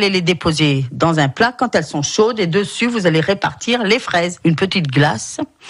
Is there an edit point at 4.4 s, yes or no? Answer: yes